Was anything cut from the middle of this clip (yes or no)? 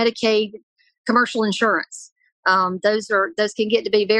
no